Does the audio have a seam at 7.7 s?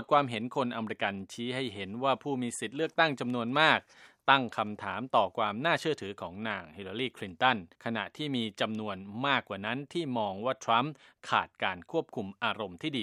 yes; 1 cut; at 7.7 s

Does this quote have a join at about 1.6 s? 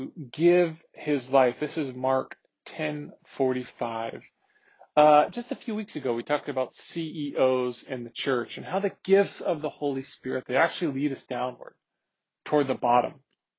no; 0 cuts

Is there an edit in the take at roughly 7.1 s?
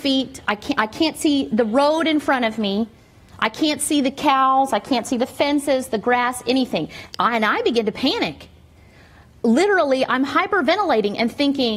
no; 0 cuts

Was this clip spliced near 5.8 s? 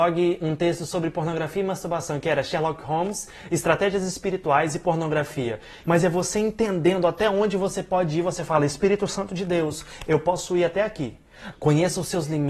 yes; 2 cuts; at 5.8 s, 11.5 s

